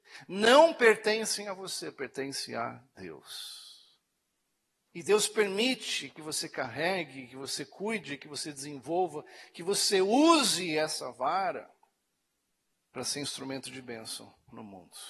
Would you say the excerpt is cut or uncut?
cut